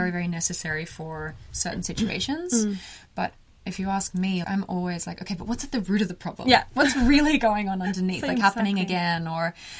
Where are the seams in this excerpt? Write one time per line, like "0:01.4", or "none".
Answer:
0:04.4
0:08.4